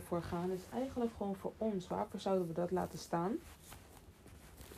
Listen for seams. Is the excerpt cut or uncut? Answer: uncut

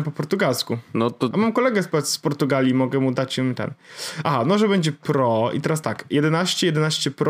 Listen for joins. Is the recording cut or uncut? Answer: uncut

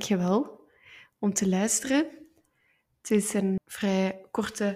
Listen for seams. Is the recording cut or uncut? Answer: cut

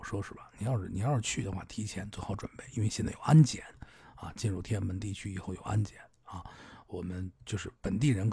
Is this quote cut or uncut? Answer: uncut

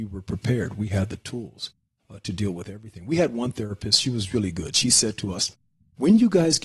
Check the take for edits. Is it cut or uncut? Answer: uncut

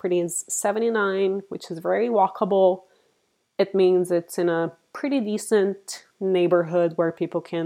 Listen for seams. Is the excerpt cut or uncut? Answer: uncut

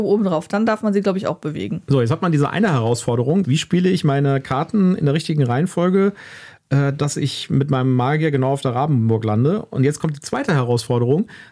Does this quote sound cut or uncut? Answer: cut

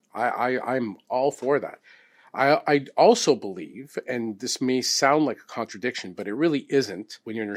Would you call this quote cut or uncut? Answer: cut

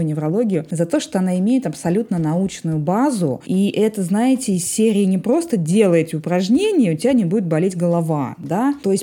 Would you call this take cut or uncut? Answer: uncut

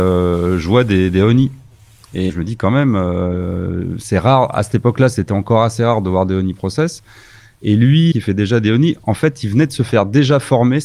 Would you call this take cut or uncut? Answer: cut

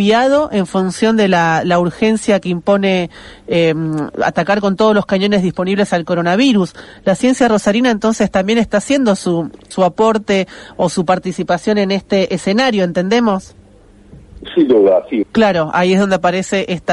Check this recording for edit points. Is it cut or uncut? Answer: cut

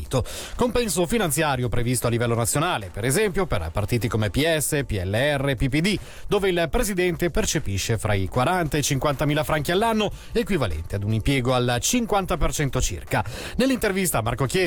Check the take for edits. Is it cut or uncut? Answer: uncut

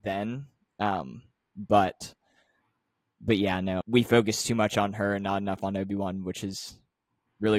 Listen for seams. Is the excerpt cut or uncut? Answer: cut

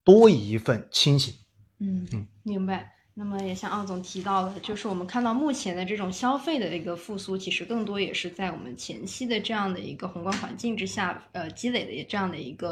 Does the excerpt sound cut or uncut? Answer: uncut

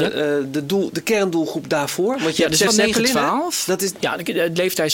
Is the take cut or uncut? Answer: cut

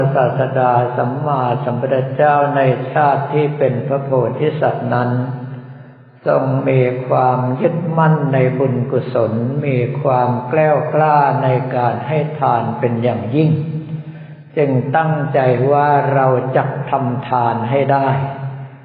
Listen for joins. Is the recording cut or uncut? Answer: uncut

